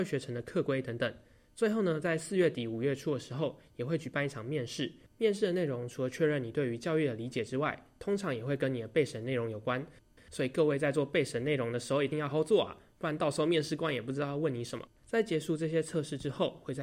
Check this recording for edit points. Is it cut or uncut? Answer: cut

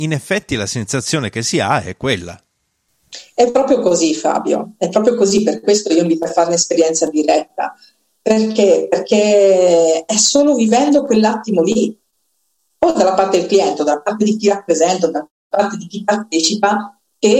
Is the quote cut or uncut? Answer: uncut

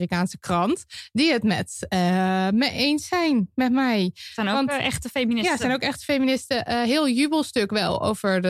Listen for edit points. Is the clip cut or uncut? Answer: uncut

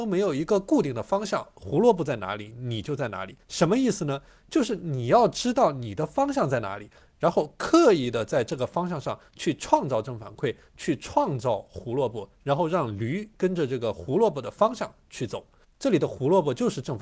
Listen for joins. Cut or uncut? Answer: cut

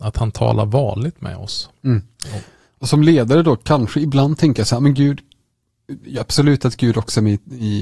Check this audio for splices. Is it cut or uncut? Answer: uncut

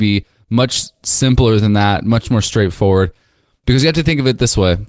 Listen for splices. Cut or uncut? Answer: uncut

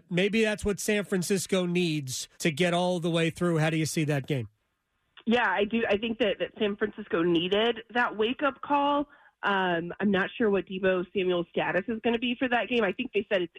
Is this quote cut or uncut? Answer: cut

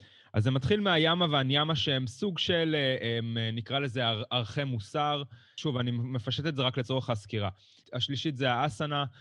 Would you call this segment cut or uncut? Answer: uncut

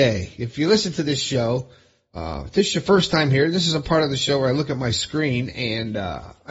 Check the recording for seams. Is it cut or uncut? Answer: uncut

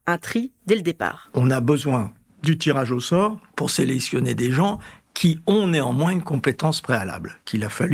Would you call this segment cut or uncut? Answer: uncut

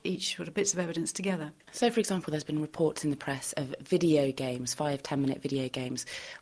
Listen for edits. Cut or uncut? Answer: uncut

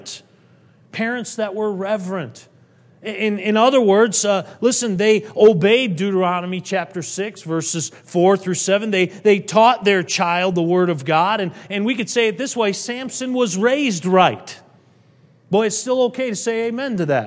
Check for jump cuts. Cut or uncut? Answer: uncut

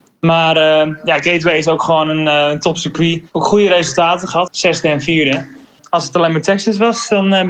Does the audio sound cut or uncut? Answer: cut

